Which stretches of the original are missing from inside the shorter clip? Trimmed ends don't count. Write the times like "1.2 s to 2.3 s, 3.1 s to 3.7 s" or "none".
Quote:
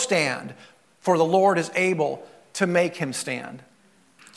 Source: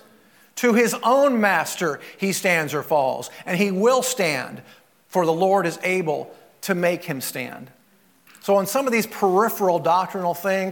none